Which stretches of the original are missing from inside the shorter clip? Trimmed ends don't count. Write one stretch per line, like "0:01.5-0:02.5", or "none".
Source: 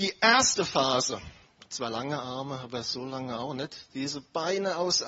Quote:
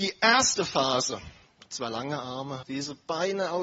0:02.6-0:03.9